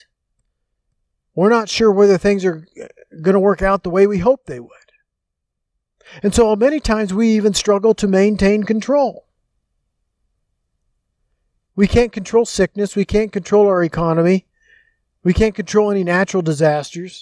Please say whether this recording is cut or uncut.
uncut